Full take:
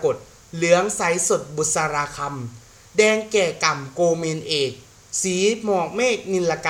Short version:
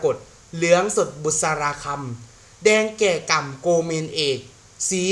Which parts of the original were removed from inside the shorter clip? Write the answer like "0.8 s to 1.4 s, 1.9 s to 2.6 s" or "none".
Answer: 1.0 s to 1.3 s